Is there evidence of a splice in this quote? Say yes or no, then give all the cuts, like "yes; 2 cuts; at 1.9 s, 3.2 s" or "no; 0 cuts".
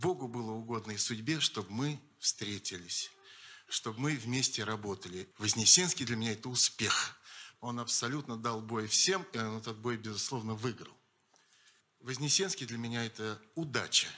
yes; 2 cuts; at 5.3 s, 7.6 s